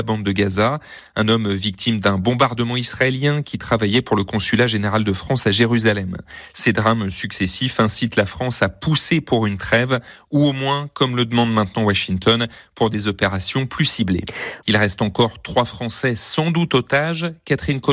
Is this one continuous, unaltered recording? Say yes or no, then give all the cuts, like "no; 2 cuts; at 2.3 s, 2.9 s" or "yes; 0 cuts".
no; 1 cut; at 14.6 s